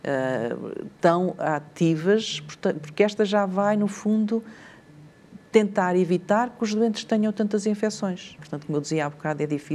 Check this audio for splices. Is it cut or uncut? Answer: cut